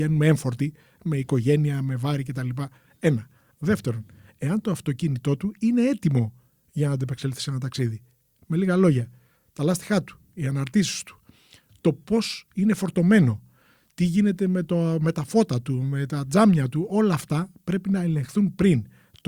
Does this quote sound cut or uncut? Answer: uncut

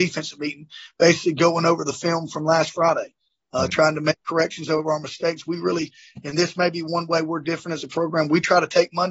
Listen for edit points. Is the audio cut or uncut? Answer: uncut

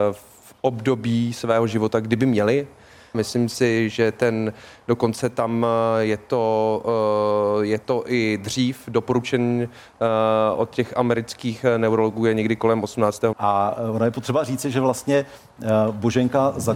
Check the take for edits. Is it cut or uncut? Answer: cut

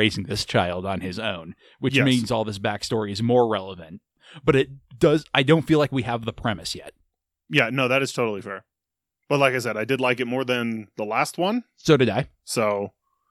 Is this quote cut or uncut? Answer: uncut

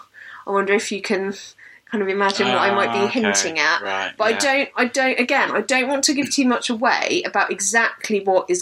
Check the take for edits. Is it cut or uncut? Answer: uncut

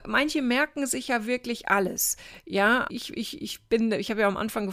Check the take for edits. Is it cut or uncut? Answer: cut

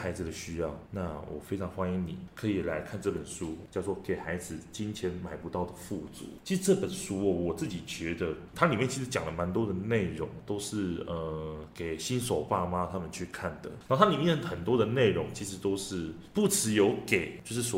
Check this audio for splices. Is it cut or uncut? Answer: cut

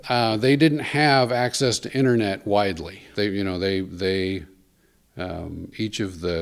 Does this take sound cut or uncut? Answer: cut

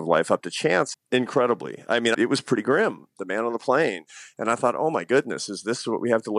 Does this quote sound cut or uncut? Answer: cut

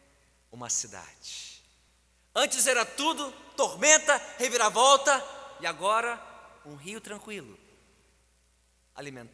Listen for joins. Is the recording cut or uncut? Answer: uncut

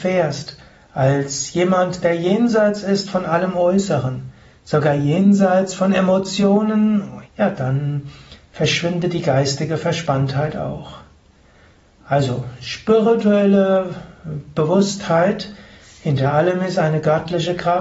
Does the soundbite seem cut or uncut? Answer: cut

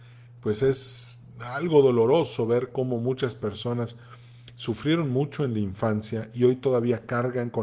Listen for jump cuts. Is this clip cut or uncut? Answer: uncut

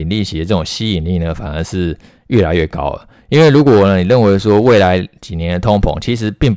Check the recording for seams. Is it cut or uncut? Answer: uncut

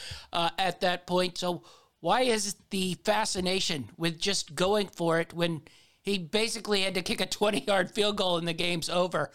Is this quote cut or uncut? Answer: cut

